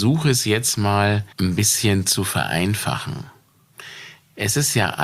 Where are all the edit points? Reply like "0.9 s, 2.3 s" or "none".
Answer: 1.3 s